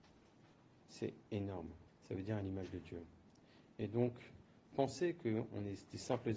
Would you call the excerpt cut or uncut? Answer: cut